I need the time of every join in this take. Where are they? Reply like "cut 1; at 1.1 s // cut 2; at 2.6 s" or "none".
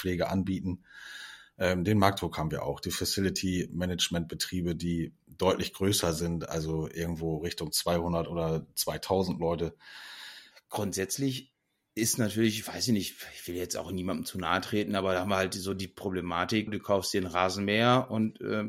cut 1; at 10.5 s // cut 2; at 16.7 s